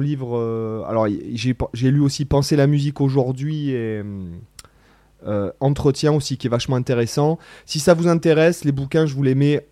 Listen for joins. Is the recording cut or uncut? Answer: uncut